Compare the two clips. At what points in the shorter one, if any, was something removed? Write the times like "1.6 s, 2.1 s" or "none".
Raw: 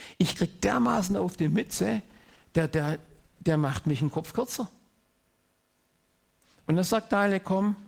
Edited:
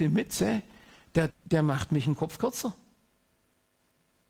1.3 s